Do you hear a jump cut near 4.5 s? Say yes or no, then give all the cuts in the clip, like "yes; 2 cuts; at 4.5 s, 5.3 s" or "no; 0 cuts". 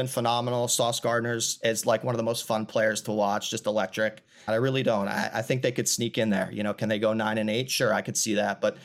yes; 1 cut; at 4.5 s